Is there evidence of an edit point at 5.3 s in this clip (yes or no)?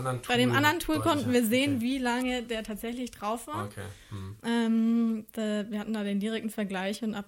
yes